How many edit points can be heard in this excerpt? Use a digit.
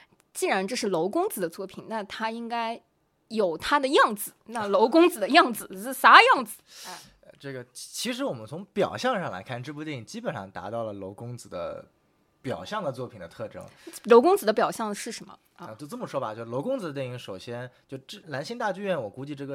1